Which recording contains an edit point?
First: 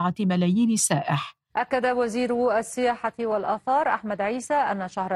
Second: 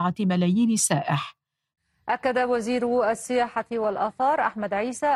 first; 1 cut; at 1.5 s

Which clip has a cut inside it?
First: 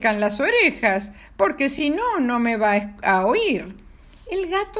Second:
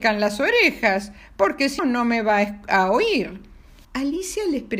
second; 2 cuts; at 1.8 s, 3.8 s

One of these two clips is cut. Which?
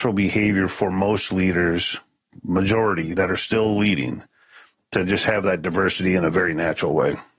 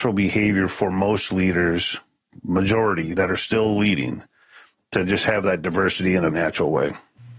second; 1 cut; at 6.3 s

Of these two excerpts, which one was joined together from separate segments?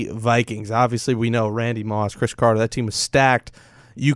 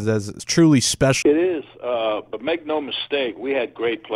second; 1 cut; at 1.2 s

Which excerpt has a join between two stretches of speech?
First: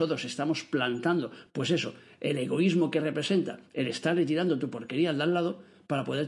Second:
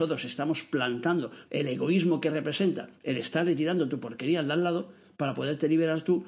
second; 1 cut; at 1.5 s

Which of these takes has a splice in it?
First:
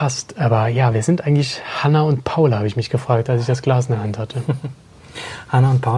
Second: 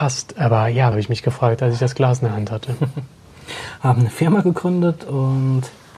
second; 2 cuts; at 0.9 s, 3.8 s

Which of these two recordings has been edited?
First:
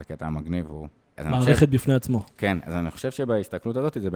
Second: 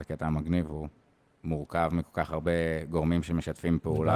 first; 1 cut; at 1.2 s

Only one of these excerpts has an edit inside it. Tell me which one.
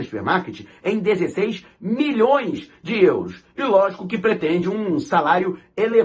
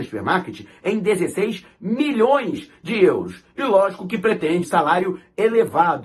second; 1 cut; at 4.6 s

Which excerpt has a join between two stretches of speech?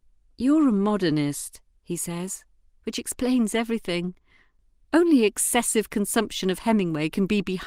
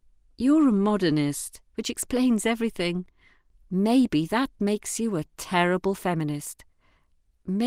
second; 2 cuts; at 1.7 s, 3.5 s

